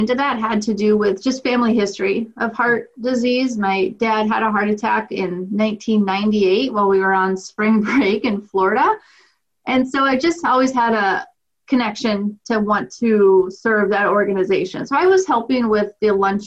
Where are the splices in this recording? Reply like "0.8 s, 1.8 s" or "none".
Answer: none

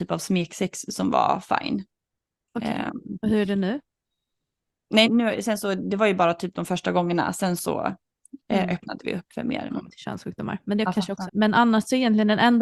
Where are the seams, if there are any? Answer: 5.0 s, 9.7 s, 11.3 s

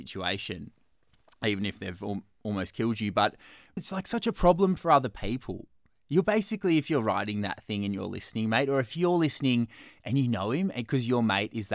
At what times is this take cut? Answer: 3.8 s

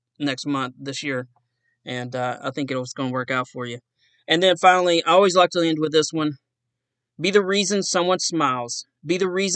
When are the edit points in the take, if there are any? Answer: none

